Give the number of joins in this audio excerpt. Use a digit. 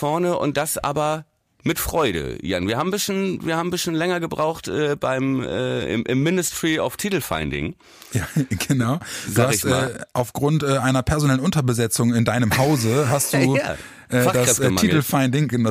0